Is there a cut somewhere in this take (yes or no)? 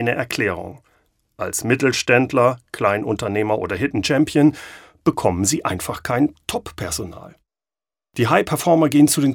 no